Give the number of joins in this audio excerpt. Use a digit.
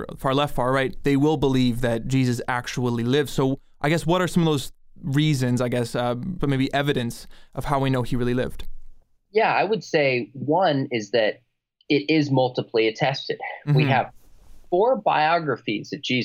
1